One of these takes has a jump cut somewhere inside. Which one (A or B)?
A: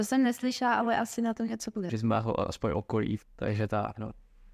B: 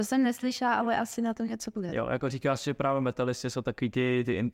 A